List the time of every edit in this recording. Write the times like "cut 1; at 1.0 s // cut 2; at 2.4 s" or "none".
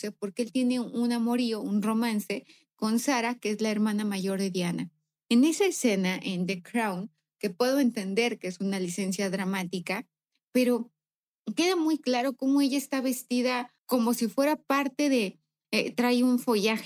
cut 1; at 13.8 s // cut 2; at 15.6 s